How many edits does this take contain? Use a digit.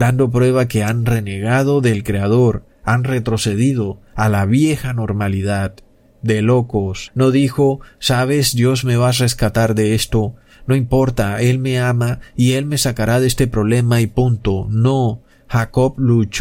1